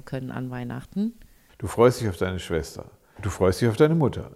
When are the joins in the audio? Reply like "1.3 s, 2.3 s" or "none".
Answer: 3.2 s